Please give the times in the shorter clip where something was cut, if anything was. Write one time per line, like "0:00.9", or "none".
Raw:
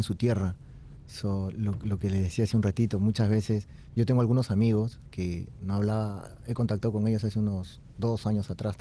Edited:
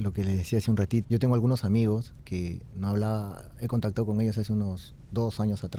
0:01.0